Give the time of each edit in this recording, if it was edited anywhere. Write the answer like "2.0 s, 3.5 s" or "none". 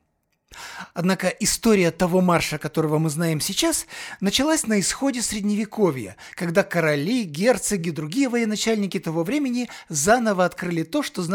none